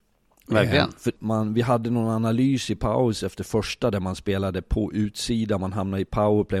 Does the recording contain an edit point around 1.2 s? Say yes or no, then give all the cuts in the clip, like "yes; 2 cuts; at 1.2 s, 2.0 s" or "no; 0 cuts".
yes; 1 cut; at 1.2 s